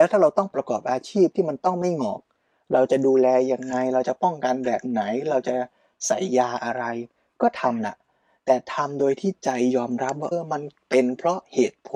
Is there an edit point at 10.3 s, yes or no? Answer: yes